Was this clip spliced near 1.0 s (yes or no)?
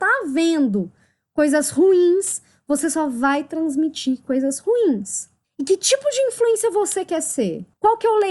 no